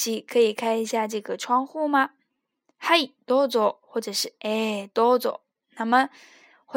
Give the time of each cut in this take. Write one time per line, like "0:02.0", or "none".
none